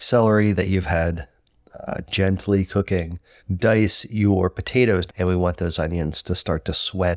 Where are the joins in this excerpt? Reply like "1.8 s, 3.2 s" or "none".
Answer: 3.4 s, 5.1 s

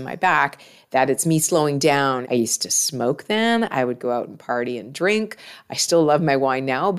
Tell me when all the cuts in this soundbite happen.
2.2 s

